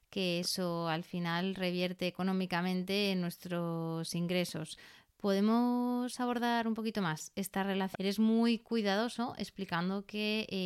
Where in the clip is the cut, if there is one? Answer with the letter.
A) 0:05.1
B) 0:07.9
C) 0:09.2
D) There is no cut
B